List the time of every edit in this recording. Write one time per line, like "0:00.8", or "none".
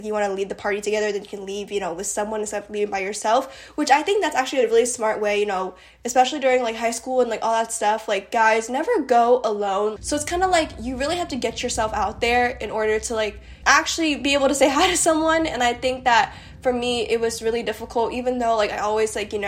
0:10.0
0:13.6